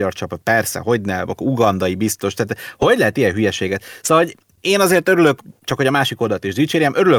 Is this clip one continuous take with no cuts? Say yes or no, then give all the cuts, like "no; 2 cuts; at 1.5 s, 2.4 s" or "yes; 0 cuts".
yes; 0 cuts